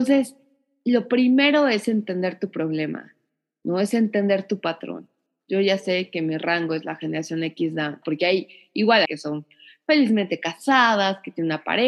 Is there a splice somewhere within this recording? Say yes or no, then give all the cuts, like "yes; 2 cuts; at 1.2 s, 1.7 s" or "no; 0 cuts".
yes; 2 cuts; at 8.0 s, 9.0 s